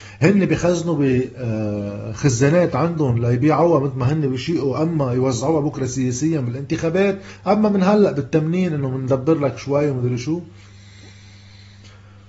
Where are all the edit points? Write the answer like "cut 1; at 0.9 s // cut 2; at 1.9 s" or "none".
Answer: none